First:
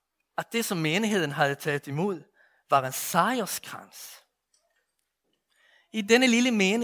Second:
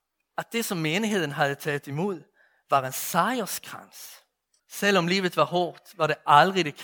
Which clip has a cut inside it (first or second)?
second